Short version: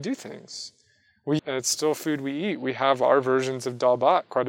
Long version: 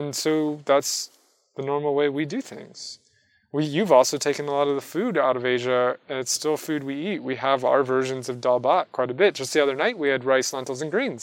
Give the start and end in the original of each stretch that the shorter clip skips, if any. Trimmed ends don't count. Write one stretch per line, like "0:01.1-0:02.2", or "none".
0:03.7-0:06.0

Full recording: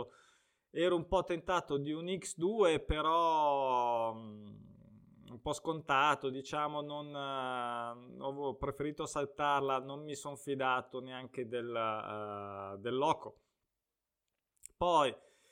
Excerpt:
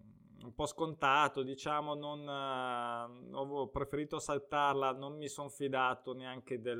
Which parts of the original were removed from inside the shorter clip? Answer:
none

